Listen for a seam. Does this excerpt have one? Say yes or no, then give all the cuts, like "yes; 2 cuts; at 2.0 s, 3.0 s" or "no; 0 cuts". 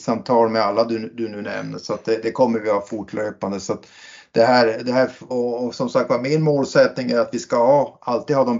yes; 1 cut; at 5.3 s